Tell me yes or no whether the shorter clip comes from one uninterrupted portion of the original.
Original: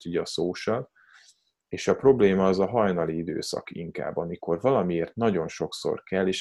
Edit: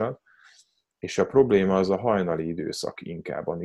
yes